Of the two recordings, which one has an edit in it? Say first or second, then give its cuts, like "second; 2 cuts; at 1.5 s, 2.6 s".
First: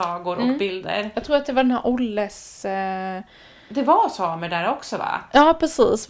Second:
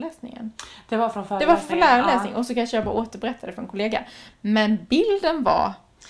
second; 1 cut; at 4.3 s